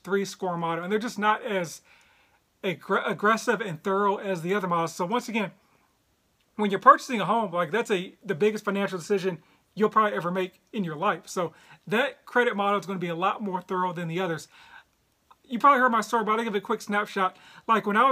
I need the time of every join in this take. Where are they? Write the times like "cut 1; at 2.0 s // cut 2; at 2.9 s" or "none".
none